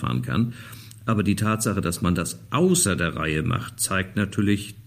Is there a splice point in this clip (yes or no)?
no